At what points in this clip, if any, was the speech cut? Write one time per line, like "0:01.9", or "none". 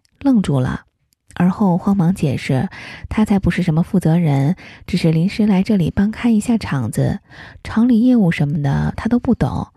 none